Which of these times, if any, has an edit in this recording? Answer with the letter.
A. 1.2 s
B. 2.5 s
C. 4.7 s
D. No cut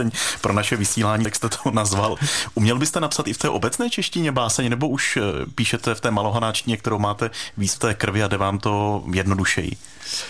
A